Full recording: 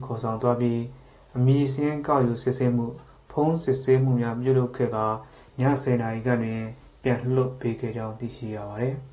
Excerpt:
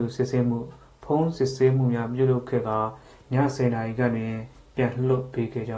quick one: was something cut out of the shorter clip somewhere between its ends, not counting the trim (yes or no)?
no